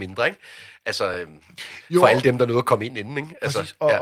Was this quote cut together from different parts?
no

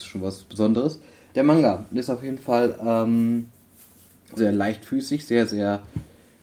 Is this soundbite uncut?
no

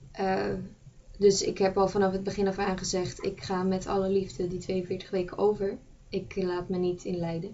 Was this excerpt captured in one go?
yes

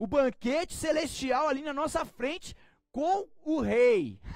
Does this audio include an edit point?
no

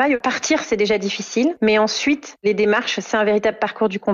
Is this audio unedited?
yes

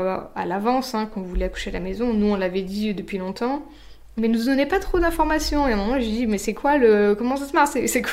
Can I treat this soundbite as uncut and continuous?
no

